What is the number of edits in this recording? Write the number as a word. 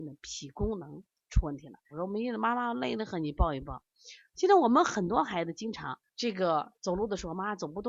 two